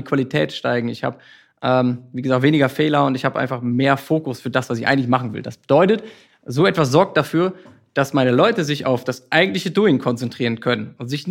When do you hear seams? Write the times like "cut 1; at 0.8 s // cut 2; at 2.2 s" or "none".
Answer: none